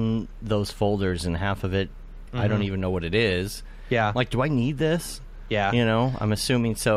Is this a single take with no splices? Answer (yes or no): no